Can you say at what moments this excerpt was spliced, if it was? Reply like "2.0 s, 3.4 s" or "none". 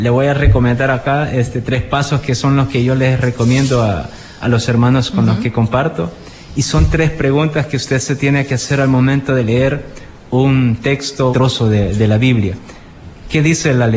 4.4 s, 11.3 s